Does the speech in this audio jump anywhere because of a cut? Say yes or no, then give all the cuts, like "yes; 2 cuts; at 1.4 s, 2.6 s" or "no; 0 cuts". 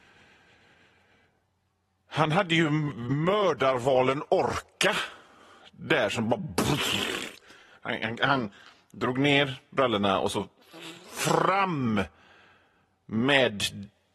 no; 0 cuts